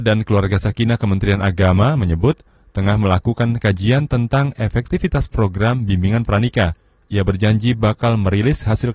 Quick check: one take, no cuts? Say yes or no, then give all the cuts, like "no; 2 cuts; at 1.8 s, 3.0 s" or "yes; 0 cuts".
no; 2 cuts; at 2.0 s, 7.0 s